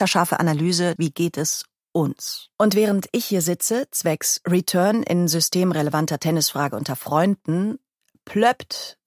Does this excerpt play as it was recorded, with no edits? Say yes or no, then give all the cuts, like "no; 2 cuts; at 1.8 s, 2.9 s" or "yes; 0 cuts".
no; 2 cuts; at 1.0 s, 2.5 s